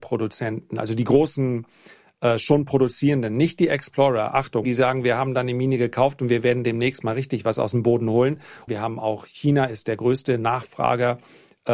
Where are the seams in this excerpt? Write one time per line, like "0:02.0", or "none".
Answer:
0:04.6
0:08.7